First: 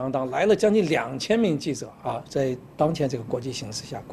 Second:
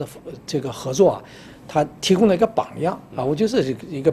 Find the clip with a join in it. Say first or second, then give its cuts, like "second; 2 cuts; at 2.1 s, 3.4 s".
first; 1 cut; at 2.2 s